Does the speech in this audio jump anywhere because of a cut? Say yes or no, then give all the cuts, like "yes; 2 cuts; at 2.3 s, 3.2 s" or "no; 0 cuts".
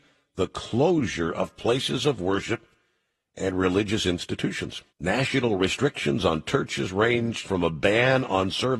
yes; 2 cuts; at 4.9 s, 7.4 s